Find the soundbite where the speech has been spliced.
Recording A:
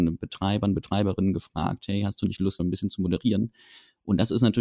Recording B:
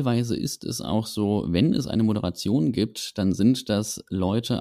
A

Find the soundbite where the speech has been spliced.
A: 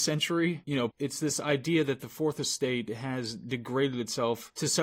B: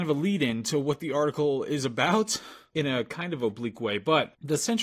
A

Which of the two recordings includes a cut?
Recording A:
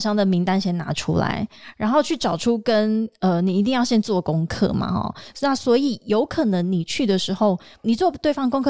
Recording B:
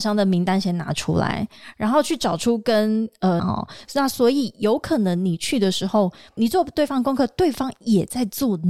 B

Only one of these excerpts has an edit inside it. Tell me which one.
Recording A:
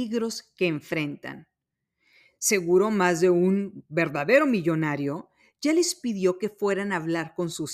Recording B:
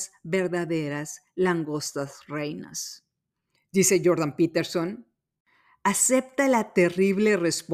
B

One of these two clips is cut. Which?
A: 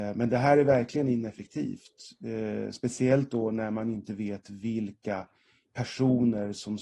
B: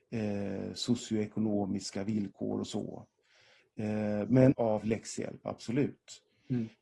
B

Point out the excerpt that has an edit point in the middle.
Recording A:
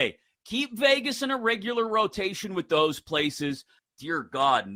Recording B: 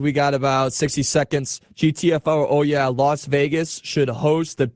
A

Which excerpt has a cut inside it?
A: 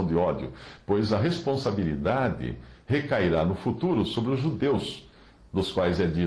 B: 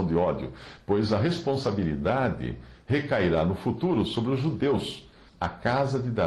B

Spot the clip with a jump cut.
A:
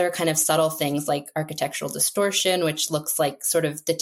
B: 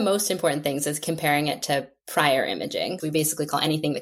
B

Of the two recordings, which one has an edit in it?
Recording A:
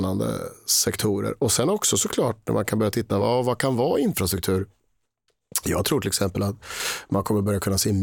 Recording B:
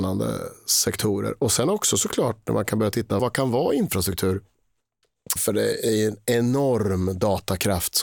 B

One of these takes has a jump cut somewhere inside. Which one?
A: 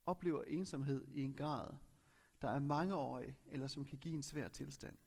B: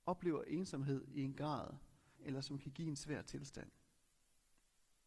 B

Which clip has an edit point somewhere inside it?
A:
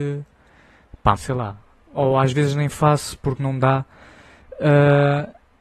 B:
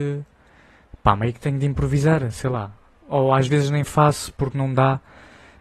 A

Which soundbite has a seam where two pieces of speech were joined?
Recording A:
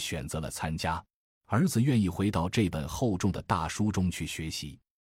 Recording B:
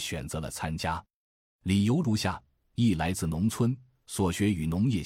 A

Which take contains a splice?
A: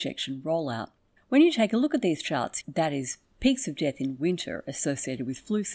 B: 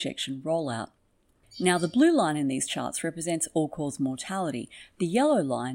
A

